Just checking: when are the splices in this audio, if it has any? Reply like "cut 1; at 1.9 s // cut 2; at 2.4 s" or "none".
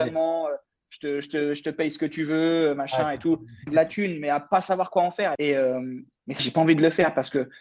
cut 1; at 3.7 s // cut 2; at 5.3 s // cut 3; at 6.4 s

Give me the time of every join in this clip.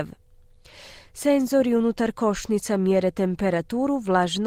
none

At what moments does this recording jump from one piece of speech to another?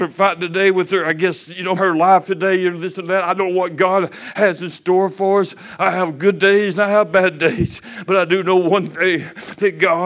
cut 1; at 1.8 s

